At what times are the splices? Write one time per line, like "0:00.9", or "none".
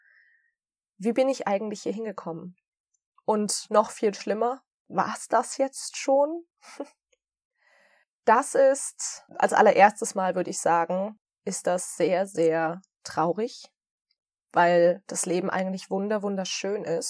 none